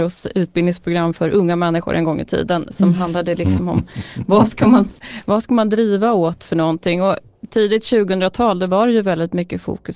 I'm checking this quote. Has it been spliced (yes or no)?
yes